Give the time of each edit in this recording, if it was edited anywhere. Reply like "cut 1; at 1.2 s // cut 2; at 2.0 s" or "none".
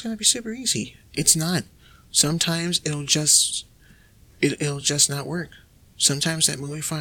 none